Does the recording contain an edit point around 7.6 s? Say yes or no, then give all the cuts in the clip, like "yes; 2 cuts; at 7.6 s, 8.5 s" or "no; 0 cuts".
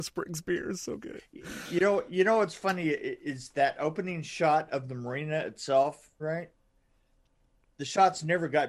no; 1 cut; at 6.2 s